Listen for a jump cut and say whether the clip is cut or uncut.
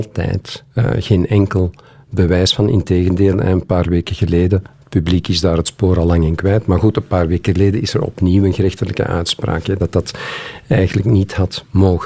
uncut